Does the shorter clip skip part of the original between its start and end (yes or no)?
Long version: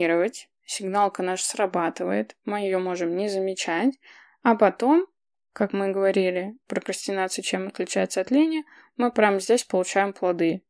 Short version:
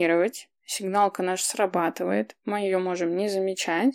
no